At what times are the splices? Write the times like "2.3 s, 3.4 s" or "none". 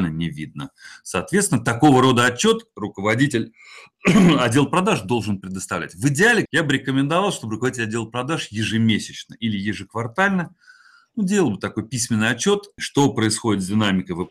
6.5 s, 12.8 s